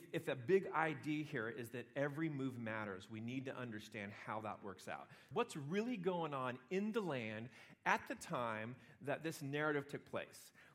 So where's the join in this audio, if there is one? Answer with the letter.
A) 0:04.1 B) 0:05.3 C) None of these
B